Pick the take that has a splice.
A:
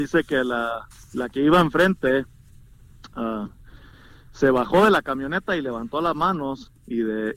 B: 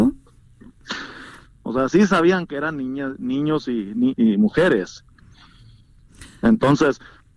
B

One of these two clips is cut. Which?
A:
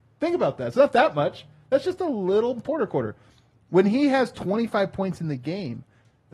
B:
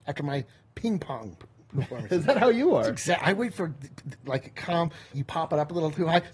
B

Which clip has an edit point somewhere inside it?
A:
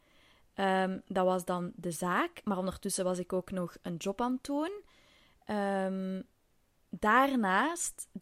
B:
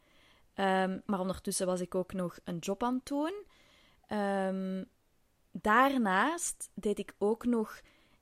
B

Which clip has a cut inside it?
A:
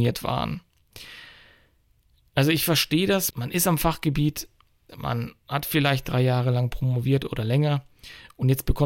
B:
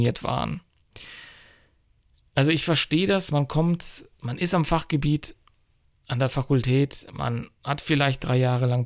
A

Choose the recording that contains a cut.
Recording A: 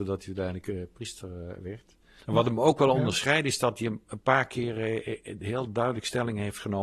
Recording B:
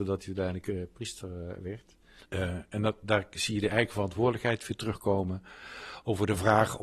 B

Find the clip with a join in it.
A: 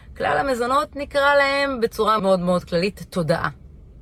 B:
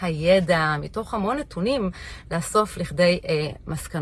A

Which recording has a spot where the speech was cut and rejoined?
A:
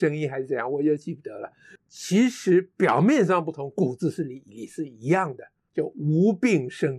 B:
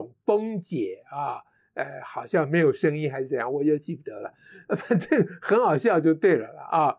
A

